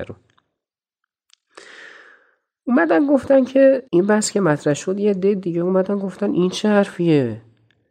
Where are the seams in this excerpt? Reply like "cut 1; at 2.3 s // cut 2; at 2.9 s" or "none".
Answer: cut 1; at 3.9 s